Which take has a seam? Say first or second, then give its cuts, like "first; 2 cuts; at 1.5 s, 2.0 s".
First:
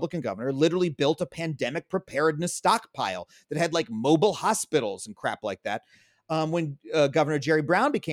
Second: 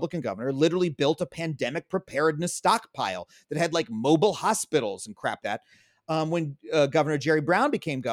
second; 1 cut; at 5.4 s